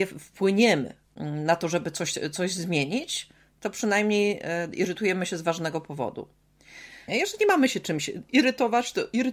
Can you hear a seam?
yes; 1 cut; at 7.1 s

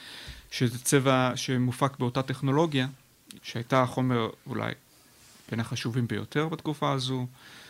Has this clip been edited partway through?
yes; 1 cut; at 3.4 s

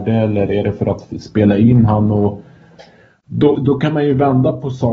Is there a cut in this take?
yes; 1 cut; at 3.6 s

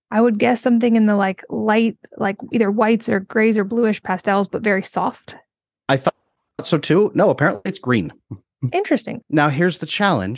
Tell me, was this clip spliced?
yes; 1 cut; at 9.2 s

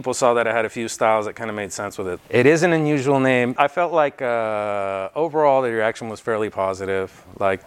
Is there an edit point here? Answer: yes; 2 cuts; at 2.2 s, 3.6 s

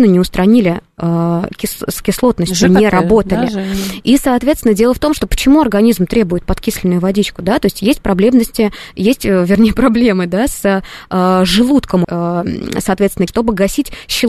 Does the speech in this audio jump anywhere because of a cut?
yes; 2 cuts; at 12.0 s, 13.3 s

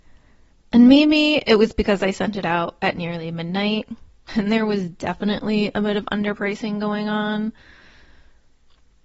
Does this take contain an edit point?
yes; 1 cut; at 4.3 s

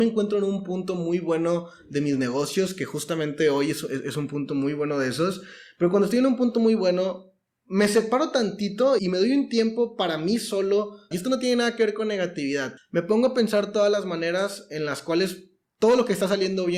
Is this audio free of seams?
no; 3 cuts; at 9.0 s, 11.1 s, 12.8 s

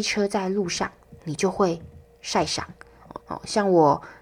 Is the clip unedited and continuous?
no; 2 cuts; at 1.2 s, 3.2 s

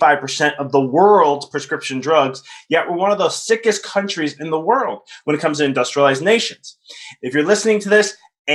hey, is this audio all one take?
no; 1 cut; at 7.2 s

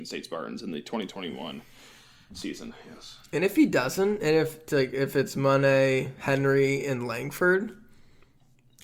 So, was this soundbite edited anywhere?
no; 0 cuts

